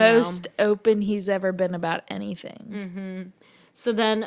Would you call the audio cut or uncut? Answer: uncut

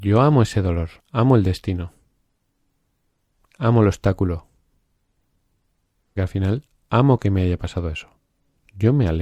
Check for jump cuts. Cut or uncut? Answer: cut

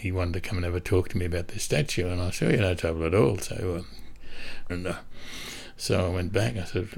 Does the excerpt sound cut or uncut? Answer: cut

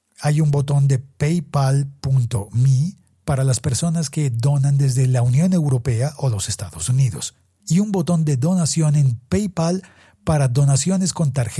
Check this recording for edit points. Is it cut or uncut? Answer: uncut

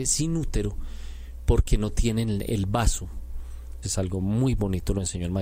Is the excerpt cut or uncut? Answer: cut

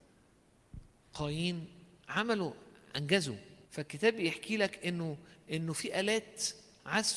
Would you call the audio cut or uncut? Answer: cut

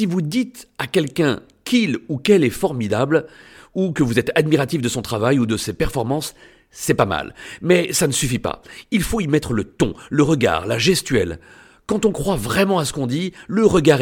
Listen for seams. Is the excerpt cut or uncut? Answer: uncut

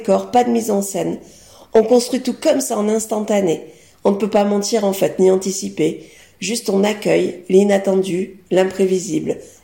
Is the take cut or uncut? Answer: uncut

